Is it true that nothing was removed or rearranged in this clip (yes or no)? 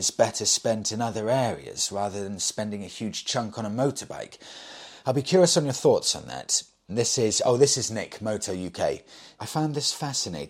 no